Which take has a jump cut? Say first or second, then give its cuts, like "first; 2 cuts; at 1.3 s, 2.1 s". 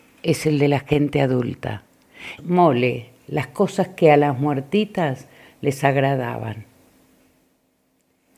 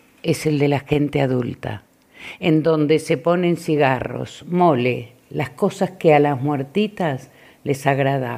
first; 1 cut; at 2.4 s